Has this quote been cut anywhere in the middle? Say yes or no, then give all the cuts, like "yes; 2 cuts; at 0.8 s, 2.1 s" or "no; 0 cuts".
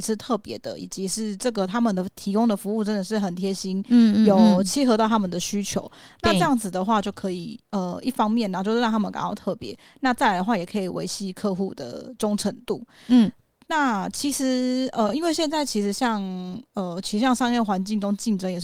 no; 0 cuts